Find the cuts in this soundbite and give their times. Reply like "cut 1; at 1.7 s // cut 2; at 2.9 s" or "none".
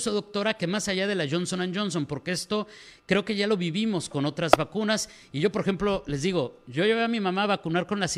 none